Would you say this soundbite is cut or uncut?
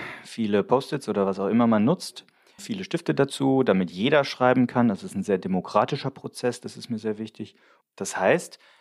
cut